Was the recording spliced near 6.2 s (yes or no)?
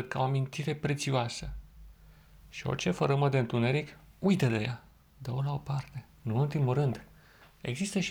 yes